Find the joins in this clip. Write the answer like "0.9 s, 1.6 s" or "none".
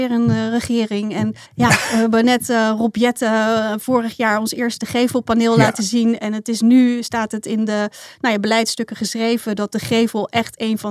1.4 s